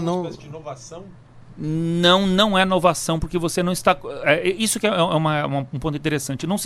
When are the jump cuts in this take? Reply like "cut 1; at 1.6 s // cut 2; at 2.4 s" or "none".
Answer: none